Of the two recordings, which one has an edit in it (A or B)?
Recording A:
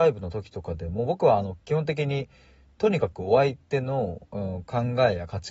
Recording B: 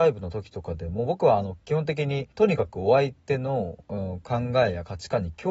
B